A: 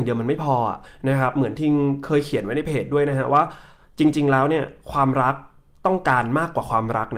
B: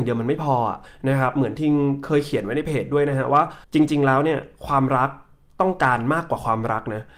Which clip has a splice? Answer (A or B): B